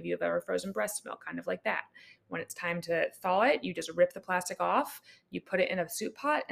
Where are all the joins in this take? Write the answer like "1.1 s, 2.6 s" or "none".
none